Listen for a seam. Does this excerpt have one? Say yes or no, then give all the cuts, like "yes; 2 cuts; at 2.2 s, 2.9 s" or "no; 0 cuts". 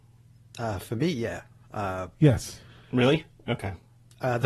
no; 0 cuts